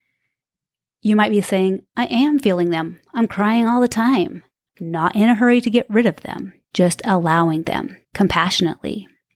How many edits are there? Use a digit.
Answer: 3